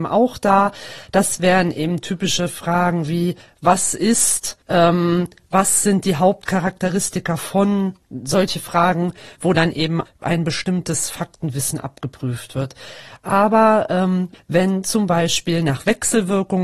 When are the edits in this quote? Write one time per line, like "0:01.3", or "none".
0:04.6
0:14.3